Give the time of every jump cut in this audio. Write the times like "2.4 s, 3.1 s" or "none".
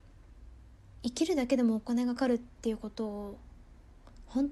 2.2 s

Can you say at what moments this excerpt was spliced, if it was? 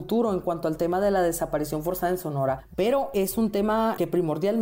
2.7 s

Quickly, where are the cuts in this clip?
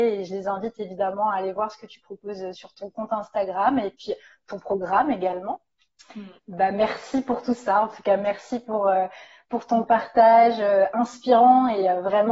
6.4 s

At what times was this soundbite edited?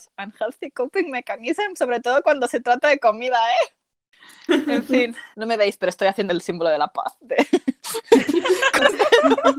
5.3 s

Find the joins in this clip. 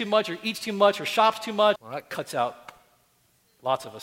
1.8 s

